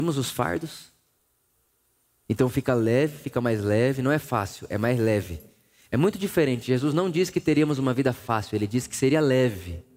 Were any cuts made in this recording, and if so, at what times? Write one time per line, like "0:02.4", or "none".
none